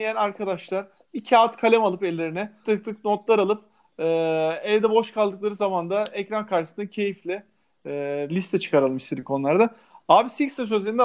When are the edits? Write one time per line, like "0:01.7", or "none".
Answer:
0:02.6
0:08.3